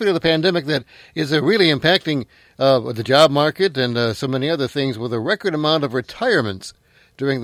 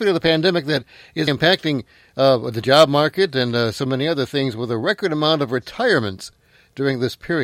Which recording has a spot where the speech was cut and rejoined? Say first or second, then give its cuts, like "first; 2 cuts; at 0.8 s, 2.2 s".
second; 1 cut; at 1.3 s